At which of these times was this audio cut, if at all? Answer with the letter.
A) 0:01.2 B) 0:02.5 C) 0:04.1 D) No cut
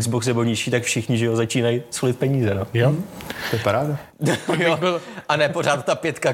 C